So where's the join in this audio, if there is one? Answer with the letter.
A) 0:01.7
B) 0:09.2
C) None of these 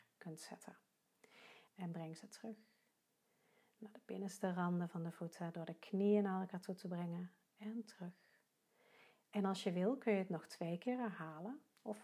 A